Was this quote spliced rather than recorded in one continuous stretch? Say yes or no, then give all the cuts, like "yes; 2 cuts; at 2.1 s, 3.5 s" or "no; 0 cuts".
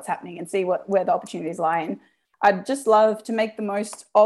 no; 0 cuts